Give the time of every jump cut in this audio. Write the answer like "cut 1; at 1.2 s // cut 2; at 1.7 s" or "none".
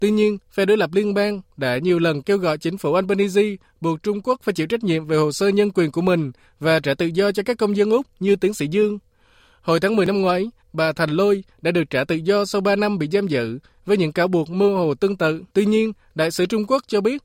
cut 1; at 10.6 s // cut 2; at 15.5 s

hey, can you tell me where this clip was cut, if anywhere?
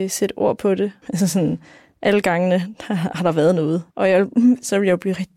cut 1; at 1.0 s // cut 2; at 3.9 s

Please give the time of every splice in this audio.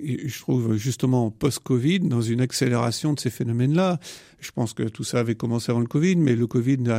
none

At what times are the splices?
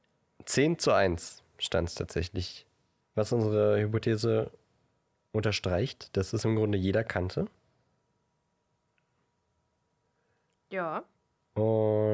cut 1; at 3.0 s

